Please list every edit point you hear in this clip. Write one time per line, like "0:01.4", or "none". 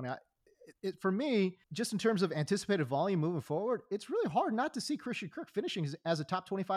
0:01.6